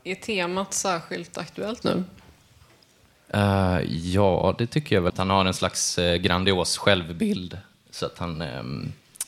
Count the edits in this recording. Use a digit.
2